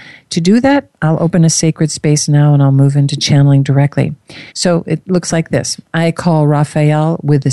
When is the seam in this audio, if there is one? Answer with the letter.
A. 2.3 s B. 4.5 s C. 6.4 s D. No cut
B